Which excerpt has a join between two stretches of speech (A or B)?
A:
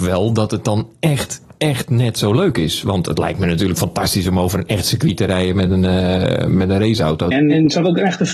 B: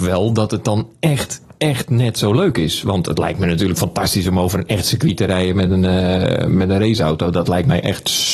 A